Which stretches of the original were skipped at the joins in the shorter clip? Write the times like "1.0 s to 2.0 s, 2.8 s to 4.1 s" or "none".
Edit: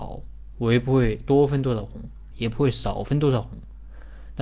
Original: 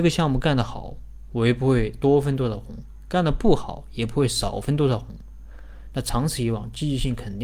3.1 s to 3.9 s